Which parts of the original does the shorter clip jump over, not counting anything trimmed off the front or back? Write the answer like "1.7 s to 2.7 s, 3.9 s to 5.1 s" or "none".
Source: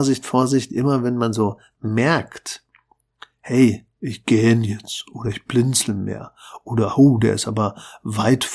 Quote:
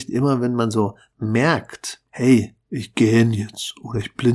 2.7 s to 3.4 s